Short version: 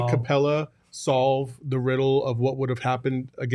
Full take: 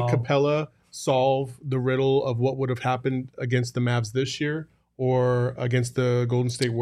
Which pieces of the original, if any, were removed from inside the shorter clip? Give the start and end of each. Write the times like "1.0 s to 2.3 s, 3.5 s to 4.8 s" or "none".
none